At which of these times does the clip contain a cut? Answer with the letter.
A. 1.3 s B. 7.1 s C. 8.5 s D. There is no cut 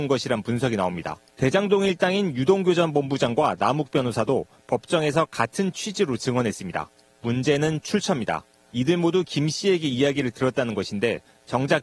A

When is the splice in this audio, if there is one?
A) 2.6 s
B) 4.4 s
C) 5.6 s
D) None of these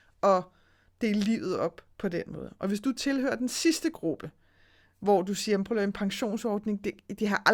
D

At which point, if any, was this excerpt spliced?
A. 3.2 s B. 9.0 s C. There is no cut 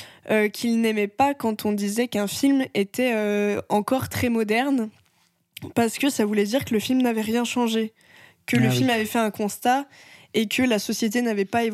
C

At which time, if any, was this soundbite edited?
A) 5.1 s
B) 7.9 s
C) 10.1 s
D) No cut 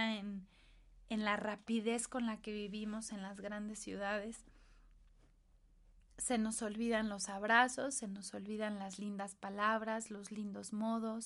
D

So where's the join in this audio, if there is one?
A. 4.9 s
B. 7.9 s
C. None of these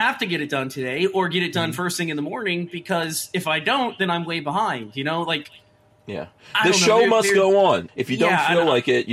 B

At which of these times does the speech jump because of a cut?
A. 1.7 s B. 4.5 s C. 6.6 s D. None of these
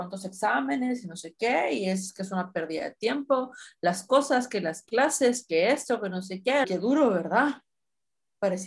C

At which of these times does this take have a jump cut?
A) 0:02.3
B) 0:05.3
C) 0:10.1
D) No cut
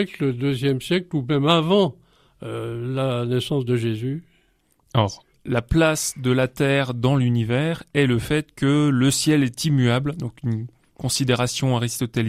B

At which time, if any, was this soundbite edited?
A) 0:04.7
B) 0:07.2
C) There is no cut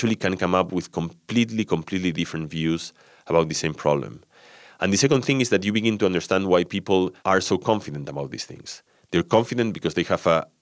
B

